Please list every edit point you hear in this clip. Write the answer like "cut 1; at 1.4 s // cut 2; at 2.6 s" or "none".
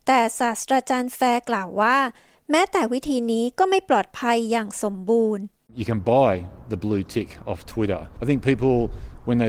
cut 1; at 8.2 s